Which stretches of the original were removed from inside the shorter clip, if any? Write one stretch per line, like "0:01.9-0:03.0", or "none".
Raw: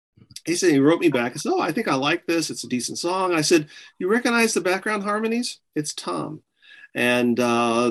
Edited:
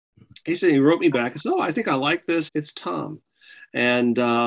0:02.5-0:05.7